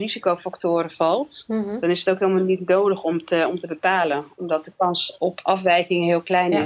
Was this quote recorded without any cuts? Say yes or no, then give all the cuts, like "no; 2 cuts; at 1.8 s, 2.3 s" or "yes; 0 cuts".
yes; 0 cuts